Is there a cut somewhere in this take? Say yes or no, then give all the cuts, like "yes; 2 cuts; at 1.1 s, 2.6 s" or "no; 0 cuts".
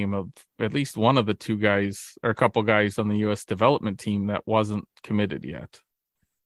no; 0 cuts